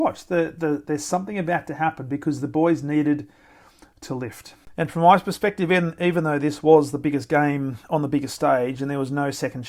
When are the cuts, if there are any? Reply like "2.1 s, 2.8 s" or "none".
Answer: none